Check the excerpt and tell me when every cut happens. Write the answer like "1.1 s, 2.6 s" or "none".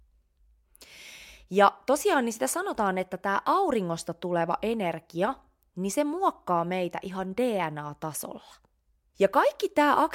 9.1 s